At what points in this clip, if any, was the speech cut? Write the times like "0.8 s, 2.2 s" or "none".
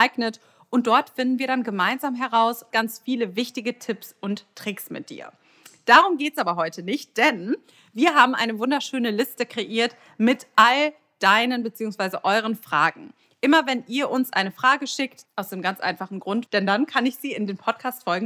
2.7 s, 15.3 s, 16.5 s